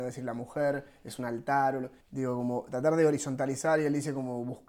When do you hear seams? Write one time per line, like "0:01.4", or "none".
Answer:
0:02.0